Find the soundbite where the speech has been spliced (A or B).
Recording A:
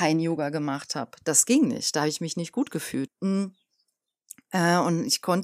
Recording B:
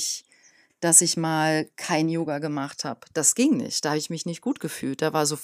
A